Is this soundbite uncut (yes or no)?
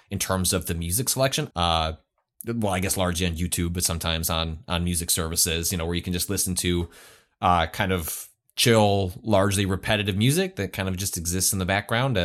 no